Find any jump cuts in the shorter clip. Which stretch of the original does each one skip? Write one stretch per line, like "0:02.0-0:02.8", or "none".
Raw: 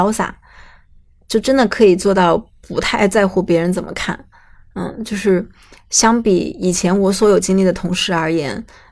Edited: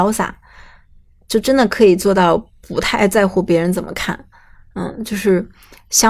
none